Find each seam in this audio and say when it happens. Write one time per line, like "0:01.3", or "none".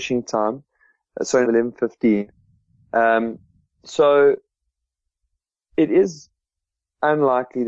0:01.4